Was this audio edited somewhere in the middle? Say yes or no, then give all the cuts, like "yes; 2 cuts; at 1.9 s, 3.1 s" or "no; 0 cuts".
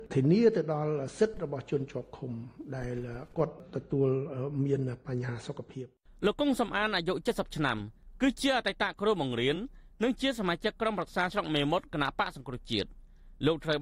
no; 0 cuts